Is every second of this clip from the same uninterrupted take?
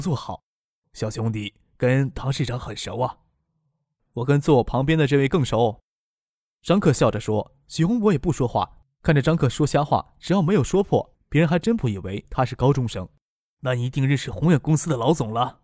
yes; 0 cuts

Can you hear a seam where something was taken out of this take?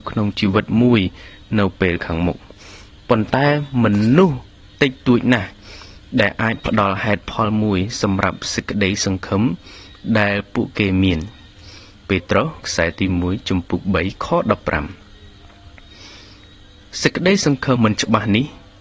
yes; 1 cut; at 17.8 s

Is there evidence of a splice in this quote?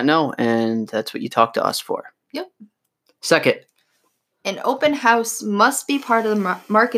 no; 0 cuts

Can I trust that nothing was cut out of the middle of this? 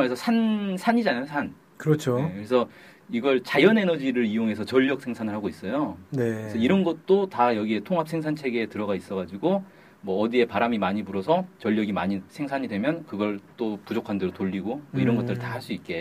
yes; 0 cuts

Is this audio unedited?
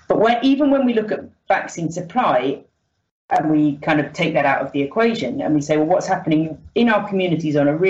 yes; 0 cuts

